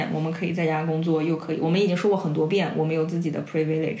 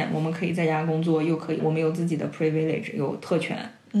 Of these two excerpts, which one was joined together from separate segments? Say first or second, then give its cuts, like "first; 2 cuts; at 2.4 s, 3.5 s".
second; 1 cut; at 1.6 s